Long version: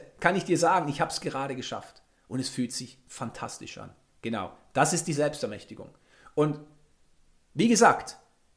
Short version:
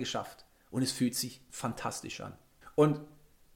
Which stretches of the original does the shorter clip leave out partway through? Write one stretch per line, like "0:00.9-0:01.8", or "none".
0:04.2-0:06.2